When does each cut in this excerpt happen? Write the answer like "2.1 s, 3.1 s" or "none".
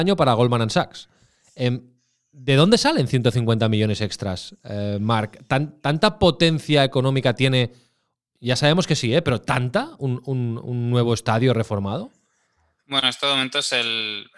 none